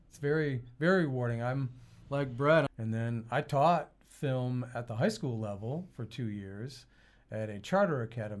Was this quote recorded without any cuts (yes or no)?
no